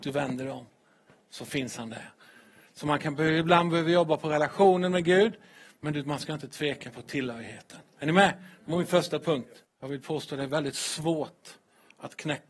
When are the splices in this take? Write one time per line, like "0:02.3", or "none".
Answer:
0:09.6